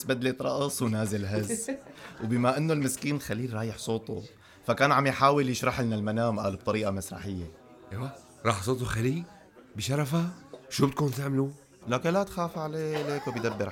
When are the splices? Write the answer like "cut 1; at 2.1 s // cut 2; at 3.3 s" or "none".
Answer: cut 1; at 11.8 s